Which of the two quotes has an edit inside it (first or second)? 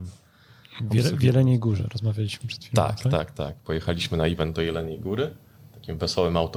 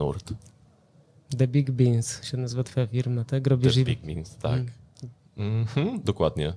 second